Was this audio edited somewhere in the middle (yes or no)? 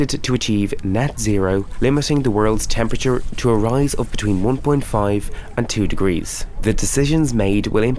yes